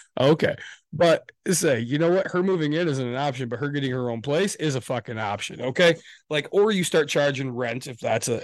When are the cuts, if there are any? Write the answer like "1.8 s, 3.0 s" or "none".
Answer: none